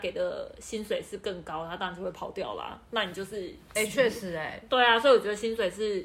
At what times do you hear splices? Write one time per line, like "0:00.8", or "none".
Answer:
0:03.7